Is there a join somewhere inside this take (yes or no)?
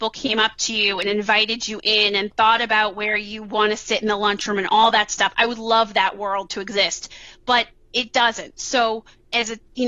no